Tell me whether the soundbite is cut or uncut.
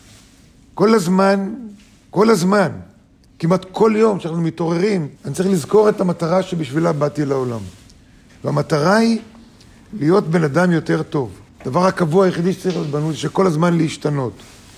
cut